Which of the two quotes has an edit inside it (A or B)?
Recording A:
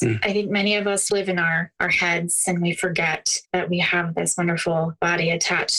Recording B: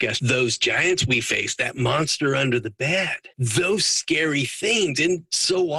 A